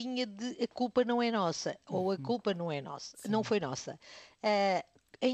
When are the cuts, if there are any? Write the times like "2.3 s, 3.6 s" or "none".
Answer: none